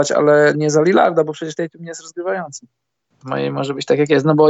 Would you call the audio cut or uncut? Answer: cut